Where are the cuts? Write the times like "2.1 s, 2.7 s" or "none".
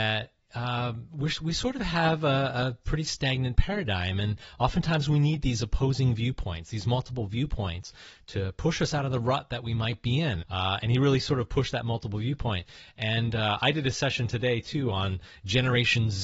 10.4 s